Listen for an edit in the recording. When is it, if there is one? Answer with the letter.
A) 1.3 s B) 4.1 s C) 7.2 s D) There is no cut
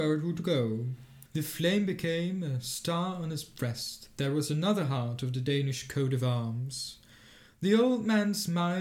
A